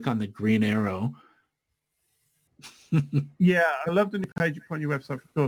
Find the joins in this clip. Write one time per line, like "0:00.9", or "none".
0:02.5